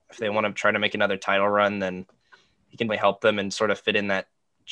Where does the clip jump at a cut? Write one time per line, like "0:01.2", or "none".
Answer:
0:02.9